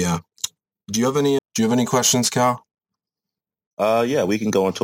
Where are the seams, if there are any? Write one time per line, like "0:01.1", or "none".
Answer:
0:01.4